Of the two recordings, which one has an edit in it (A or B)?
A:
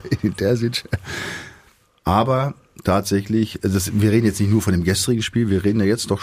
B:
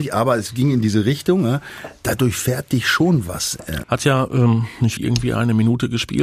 B